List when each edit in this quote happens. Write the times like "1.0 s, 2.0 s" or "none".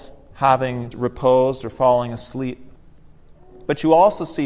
0.9 s